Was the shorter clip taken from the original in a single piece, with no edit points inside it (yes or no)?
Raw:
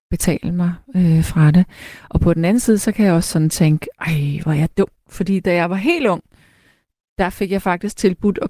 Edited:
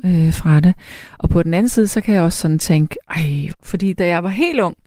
no